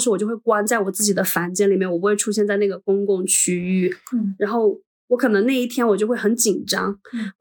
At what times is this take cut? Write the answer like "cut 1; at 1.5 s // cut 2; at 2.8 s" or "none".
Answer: cut 1; at 4.1 s